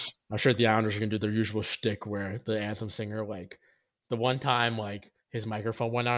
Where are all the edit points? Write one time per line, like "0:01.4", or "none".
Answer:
none

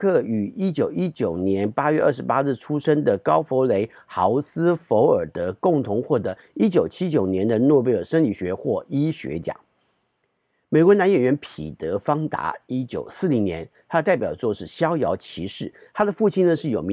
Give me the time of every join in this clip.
none

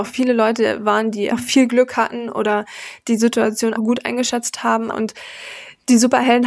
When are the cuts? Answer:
0:01.3
0:03.8
0:04.9

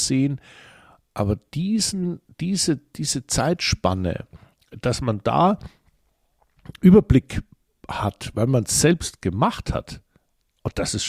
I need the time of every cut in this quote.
none

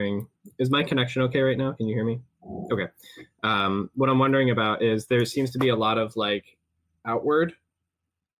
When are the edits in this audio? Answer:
none

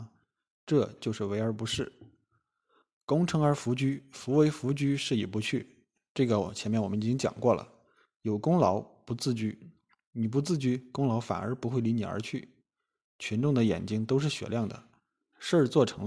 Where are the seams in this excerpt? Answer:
none

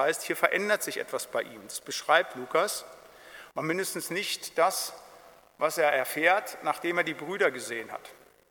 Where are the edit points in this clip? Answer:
0:03.5

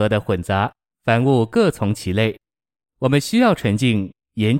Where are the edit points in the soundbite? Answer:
0:00.9

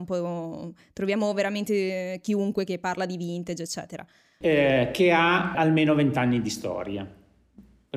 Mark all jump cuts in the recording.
0:04.4
0:05.5

